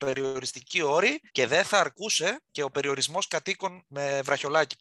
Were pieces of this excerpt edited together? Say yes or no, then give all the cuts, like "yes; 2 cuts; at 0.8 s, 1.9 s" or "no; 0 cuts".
yes; 2 cuts; at 1.3 s, 2.5 s